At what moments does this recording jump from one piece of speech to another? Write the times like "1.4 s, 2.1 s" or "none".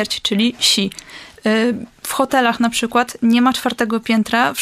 none